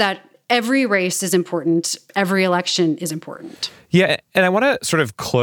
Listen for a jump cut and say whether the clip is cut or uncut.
uncut